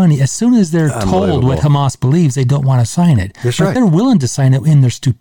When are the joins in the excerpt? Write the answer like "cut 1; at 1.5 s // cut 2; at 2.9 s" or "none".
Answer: none

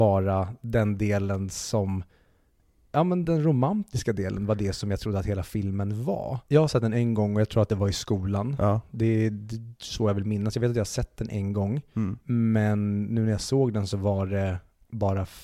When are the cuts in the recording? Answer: cut 1; at 3.2 s // cut 2; at 6.5 s

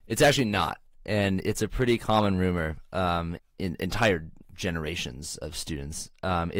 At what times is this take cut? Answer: cut 1; at 3.4 s // cut 2; at 4.4 s

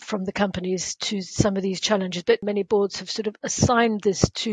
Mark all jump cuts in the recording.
none

